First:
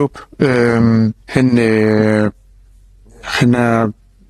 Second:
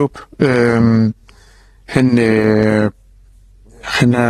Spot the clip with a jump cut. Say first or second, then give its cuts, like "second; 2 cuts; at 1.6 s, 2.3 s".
first; 1 cut; at 1.2 s